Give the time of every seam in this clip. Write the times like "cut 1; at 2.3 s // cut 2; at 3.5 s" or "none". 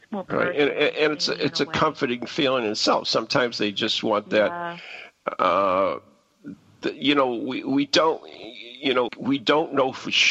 cut 1; at 9.1 s